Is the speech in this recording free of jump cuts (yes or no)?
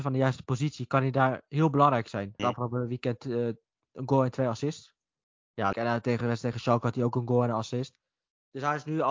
no